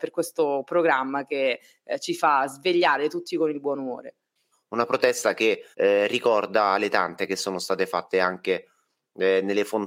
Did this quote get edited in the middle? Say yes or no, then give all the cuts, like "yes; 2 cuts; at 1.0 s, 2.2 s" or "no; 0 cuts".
yes; 2 cuts; at 4.5 s, 5.7 s